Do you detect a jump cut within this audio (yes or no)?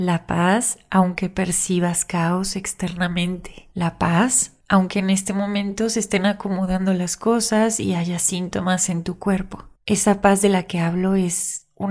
no